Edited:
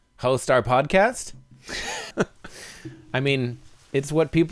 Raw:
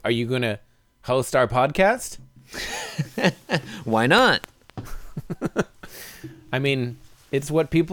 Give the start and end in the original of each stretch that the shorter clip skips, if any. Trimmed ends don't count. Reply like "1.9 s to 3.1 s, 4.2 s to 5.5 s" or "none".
3.0 s to 5.5 s